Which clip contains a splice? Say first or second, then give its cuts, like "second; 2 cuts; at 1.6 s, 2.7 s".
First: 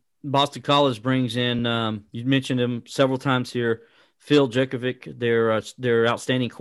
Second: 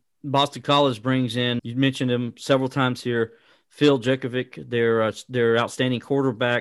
second; 1 cut; at 1.6 s